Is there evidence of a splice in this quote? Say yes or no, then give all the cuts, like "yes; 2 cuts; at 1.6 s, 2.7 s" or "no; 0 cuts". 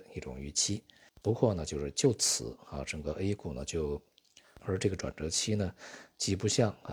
yes; 2 cuts; at 1.2 s, 4.6 s